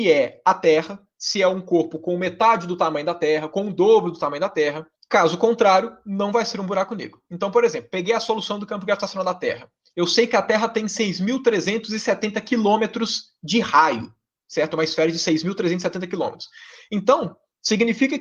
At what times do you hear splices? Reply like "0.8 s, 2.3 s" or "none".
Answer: 5.0 s